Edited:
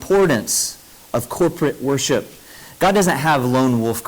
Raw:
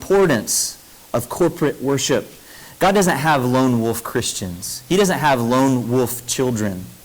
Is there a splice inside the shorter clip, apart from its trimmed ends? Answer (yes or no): no